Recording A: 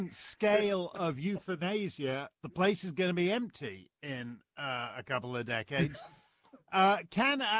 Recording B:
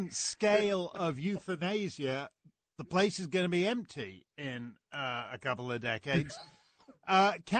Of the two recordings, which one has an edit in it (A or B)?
A